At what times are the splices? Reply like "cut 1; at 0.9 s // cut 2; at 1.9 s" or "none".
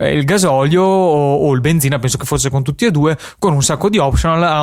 none